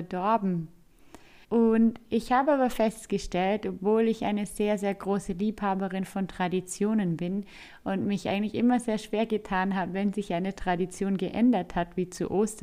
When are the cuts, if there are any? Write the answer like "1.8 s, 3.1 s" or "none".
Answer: 1.4 s